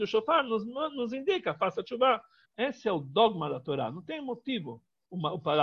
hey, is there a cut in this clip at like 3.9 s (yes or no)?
no